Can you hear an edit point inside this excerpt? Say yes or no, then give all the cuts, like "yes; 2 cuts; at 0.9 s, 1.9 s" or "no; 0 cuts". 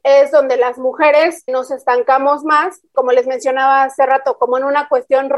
yes; 2 cuts; at 1.5 s, 2.8 s